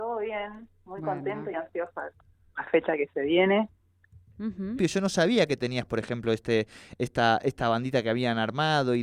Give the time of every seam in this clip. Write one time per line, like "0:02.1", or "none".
0:01.5
0:04.8